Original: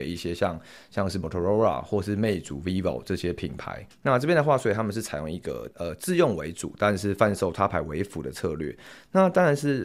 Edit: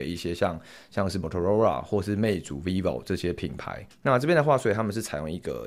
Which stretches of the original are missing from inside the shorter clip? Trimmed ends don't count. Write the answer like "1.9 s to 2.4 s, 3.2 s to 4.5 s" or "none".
none